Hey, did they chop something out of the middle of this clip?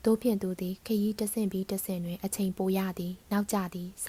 no; 0 cuts

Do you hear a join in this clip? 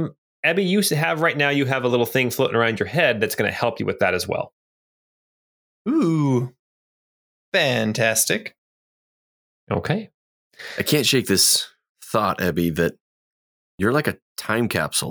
no; 0 cuts

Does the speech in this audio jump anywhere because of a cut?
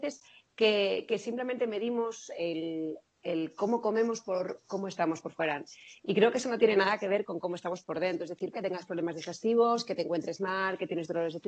yes; 1 cut; at 8.5 s

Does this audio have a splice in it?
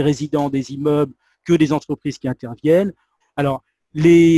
yes; 1 cut; at 3.2 s

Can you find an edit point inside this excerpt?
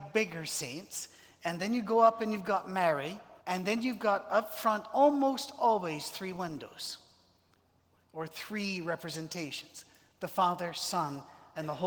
yes; 1 cut; at 3.4 s

